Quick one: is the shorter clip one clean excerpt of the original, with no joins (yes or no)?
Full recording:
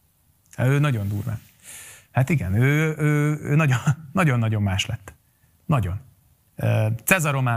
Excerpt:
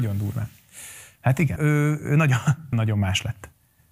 no